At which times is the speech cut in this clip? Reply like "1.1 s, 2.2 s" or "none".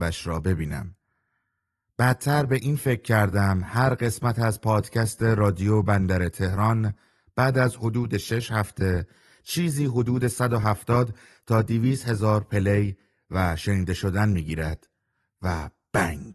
none